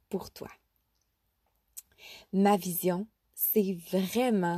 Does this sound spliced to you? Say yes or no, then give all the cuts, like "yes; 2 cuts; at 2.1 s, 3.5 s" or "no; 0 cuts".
no; 0 cuts